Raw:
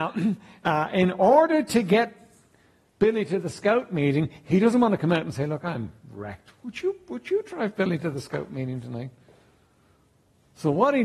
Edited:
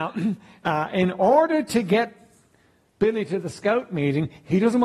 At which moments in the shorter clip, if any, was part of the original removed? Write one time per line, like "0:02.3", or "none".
none